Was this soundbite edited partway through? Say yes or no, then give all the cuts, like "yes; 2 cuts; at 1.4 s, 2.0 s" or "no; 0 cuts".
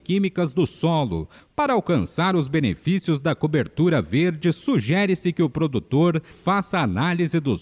yes; 2 cuts; at 1.4 s, 6.3 s